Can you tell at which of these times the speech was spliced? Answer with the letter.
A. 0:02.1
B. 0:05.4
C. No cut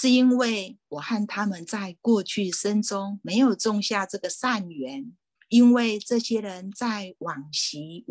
B